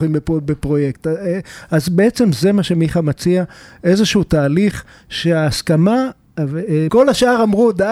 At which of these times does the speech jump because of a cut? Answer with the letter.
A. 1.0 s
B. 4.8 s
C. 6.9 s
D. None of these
C